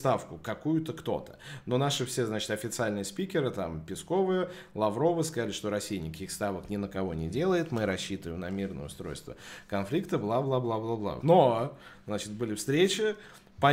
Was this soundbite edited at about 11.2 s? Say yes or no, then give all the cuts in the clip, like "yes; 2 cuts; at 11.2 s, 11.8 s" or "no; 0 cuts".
yes; 1 cut; at 11.2 s